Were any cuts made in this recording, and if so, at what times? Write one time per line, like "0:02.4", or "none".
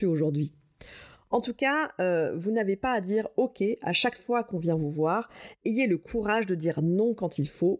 none

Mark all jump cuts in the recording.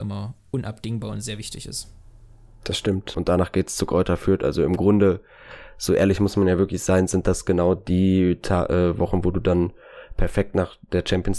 0:03.1

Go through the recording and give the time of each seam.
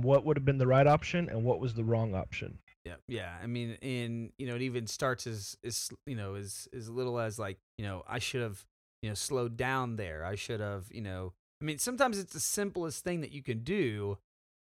0:03.0
0:07.7

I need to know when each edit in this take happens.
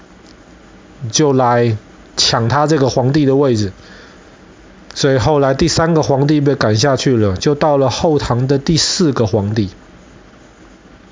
none

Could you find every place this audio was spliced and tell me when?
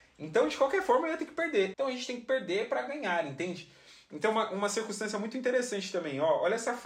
0:01.7

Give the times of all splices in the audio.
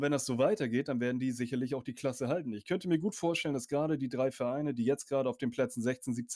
none

